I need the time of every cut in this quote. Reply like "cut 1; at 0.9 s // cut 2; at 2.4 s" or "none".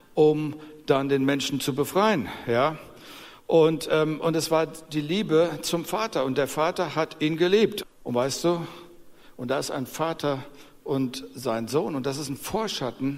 cut 1; at 7.8 s